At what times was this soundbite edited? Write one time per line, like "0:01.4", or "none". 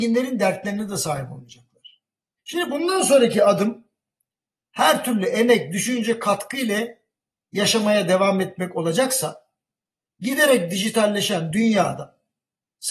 0:02.4